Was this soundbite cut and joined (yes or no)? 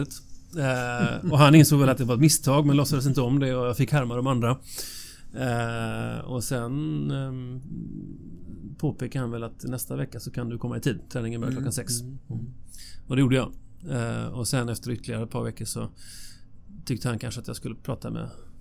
no